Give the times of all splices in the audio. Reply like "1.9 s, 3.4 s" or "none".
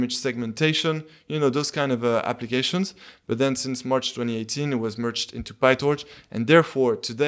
none